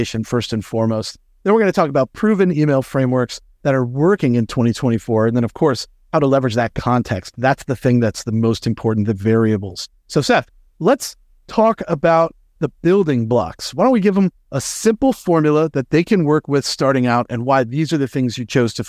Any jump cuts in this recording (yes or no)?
no